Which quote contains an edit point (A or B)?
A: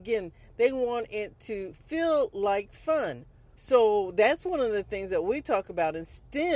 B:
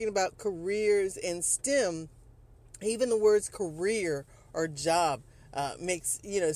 A